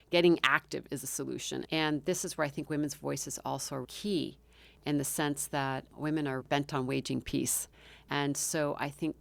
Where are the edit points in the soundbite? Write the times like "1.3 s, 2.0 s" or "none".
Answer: 1.6 s, 3.8 s, 6.4 s